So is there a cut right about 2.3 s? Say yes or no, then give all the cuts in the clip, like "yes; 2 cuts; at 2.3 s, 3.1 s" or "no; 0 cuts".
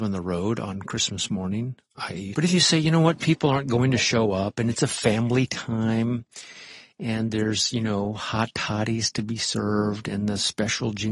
yes; 1 cut; at 2.3 s